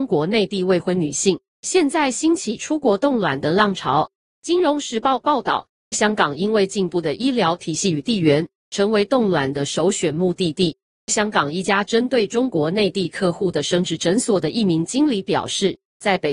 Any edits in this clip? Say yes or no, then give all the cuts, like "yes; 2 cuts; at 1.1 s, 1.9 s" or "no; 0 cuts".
no; 0 cuts